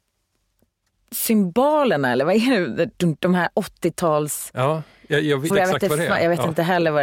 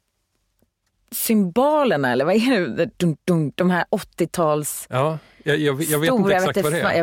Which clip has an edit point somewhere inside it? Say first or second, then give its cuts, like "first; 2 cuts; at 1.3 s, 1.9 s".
first; 2 cuts; at 3.2 s, 5.5 s